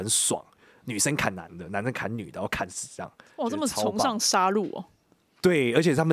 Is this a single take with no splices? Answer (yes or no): yes